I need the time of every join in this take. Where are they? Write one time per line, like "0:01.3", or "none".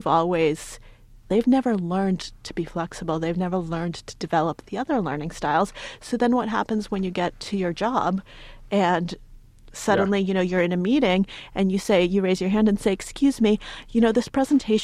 0:01.3